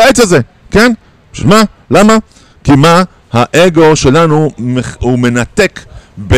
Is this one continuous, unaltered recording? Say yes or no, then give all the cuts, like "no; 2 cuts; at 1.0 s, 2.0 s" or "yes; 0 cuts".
yes; 0 cuts